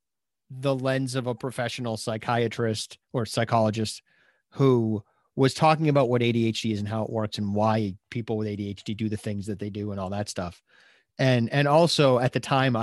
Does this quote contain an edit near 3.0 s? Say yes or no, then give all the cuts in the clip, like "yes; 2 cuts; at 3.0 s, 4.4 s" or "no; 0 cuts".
yes; 1 cut; at 3.0 s